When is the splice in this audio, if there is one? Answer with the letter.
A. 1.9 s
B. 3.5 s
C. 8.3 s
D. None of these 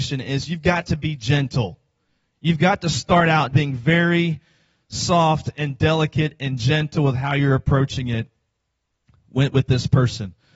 B